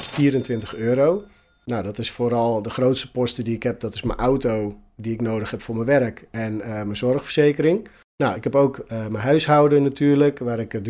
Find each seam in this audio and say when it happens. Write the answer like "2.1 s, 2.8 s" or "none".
none